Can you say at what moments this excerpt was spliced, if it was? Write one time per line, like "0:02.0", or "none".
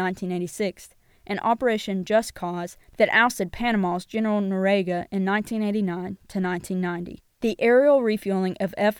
0:07.3